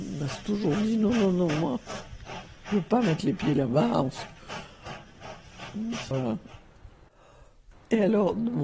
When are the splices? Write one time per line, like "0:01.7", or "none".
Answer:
0:06.1
0:07.7